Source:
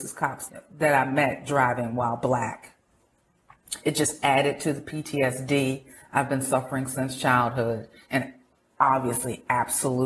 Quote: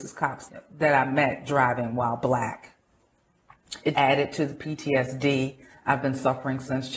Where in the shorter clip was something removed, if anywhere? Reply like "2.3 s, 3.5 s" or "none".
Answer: 3.9 s